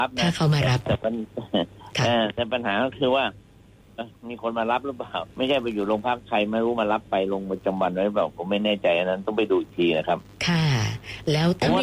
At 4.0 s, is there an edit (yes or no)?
yes